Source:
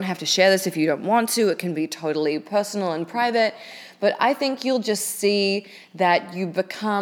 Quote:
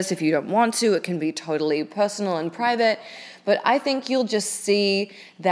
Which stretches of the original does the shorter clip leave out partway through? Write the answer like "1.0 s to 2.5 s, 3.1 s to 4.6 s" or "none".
none